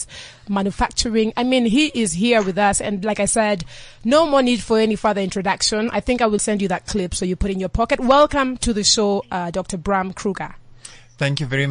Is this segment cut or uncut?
cut